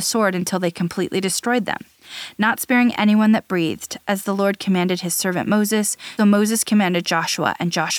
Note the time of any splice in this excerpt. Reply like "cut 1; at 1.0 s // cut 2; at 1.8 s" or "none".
cut 1; at 6.2 s